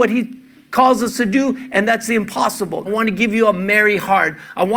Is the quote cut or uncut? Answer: cut